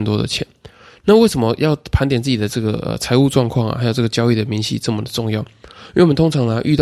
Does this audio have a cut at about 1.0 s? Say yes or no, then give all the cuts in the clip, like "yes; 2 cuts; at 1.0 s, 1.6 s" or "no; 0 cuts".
no; 0 cuts